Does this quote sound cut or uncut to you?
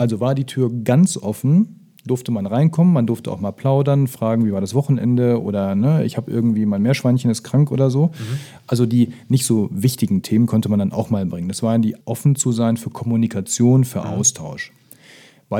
cut